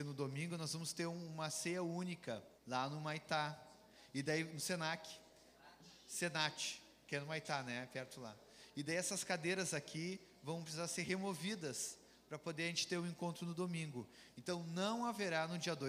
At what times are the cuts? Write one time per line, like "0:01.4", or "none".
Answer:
0:02.6